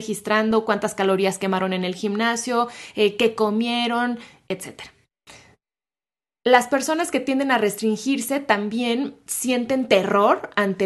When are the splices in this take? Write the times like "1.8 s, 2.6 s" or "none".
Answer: none